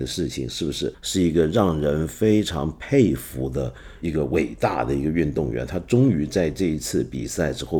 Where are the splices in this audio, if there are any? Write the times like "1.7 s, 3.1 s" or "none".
0.9 s